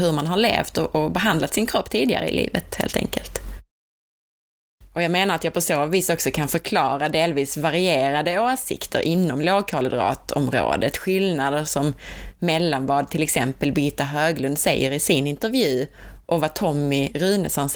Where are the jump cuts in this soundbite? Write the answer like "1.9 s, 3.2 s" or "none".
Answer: none